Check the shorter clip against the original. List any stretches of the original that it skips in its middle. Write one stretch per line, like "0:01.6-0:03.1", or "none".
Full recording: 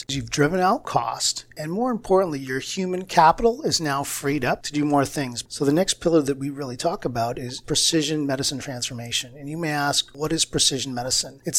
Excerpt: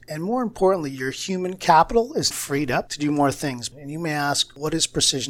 0:03.8-0:04.0
0:05.5-0:09.3